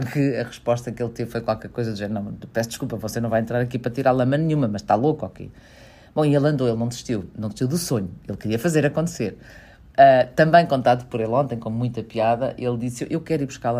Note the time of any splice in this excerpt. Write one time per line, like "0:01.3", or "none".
none

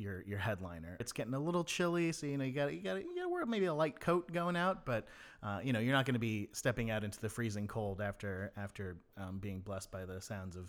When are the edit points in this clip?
0:01.0

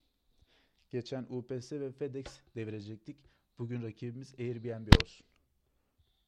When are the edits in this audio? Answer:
none

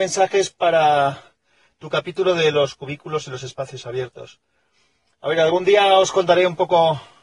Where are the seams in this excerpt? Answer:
none

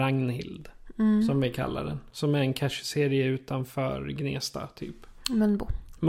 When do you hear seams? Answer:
none

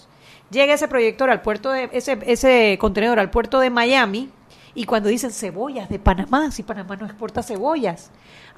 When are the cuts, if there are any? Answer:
0:01.9

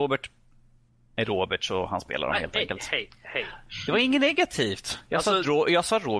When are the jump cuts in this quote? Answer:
none

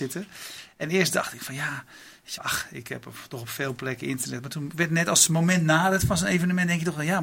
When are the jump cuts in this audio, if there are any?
0:02.4

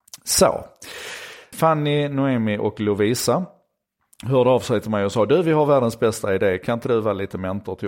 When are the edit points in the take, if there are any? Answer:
0:01.5

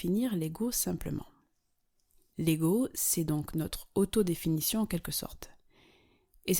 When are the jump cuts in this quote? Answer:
0:02.3

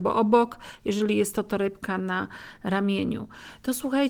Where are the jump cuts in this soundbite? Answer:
none

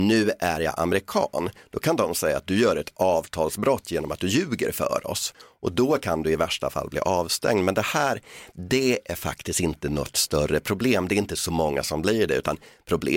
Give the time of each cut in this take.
none

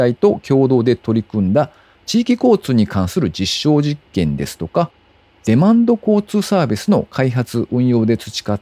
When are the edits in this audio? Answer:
none

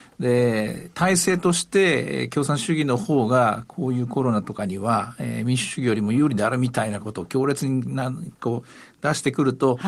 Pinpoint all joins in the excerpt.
none

